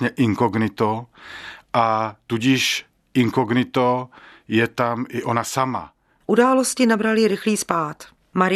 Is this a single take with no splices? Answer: yes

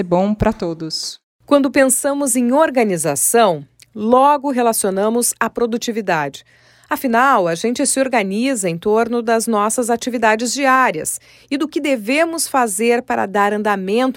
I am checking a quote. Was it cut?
no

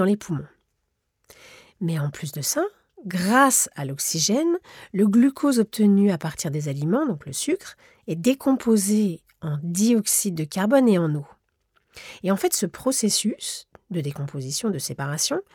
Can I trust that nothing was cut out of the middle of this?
yes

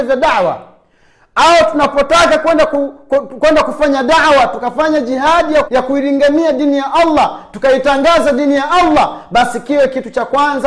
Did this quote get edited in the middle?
yes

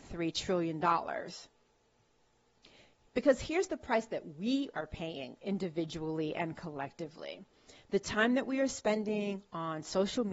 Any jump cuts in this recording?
no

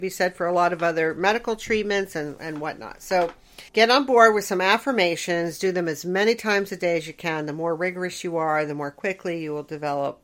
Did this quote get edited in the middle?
yes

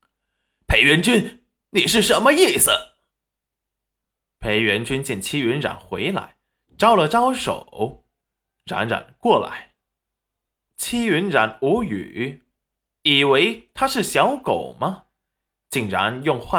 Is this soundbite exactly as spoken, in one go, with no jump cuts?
yes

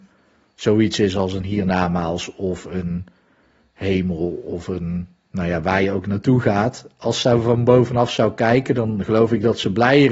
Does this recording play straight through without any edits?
yes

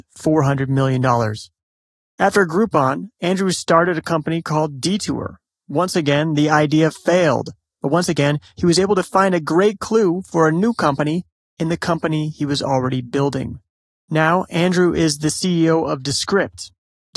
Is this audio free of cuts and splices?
yes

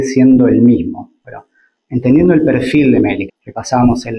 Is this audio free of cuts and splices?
no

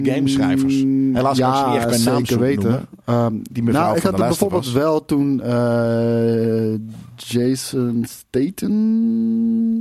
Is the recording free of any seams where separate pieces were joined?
yes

